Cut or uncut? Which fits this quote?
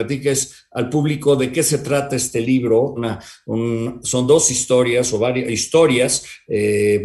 cut